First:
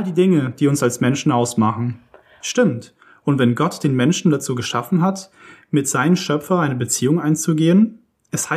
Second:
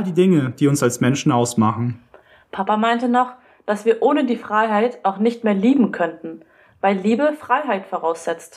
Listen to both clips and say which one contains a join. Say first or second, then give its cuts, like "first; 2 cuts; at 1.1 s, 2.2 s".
first; 1 cut; at 2.4 s